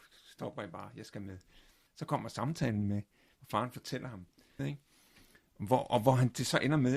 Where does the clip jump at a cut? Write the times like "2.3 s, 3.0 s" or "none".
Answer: 1.9 s, 4.6 s

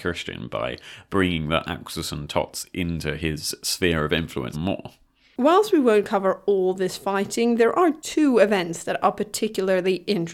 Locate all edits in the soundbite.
4.5 s

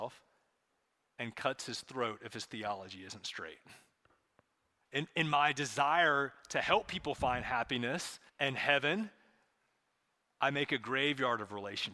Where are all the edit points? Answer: 4.8 s, 8.3 s

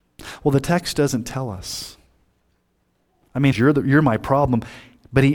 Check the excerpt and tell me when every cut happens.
3.5 s

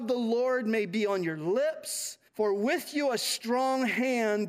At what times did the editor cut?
2.3 s

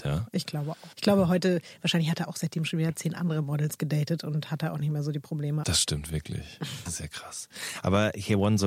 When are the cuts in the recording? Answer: 0.9 s, 5.6 s, 6.9 s

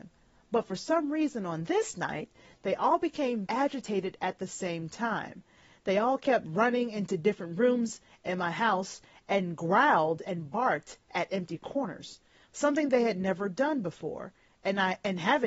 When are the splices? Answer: 3.5 s

